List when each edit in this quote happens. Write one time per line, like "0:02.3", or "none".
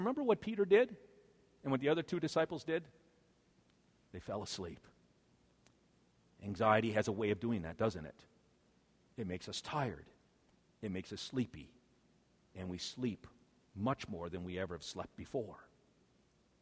none